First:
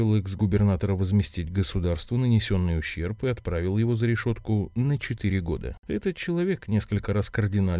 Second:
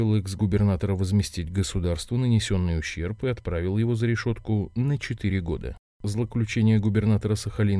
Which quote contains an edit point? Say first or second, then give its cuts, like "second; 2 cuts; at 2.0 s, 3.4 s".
first; 1 cut; at 5.8 s